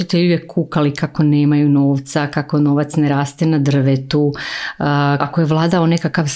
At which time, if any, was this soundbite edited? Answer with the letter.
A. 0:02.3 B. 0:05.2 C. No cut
B